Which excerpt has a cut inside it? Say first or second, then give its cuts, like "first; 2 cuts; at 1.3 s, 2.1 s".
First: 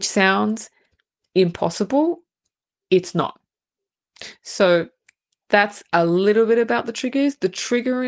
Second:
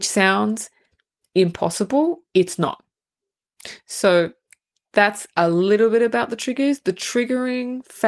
second; 1 cut; at 2.3 s